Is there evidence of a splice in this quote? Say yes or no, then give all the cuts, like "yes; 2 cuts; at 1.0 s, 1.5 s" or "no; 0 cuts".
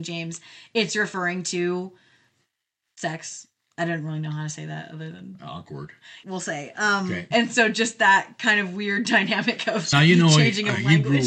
yes; 3 cuts; at 6.2 s, 7.3 s, 9.9 s